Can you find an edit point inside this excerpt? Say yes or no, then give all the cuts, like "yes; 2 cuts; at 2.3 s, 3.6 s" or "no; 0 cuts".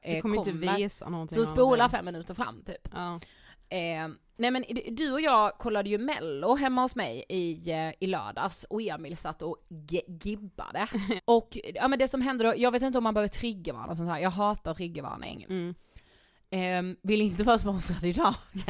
yes; 2 cuts; at 11.2 s, 15.5 s